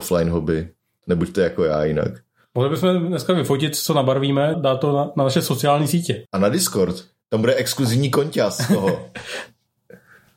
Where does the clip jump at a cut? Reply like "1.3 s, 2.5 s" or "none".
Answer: 4.5 s, 6.3 s